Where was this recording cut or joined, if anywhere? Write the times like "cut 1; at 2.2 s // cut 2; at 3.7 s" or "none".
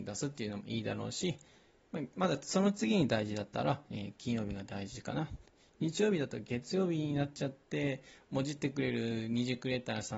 none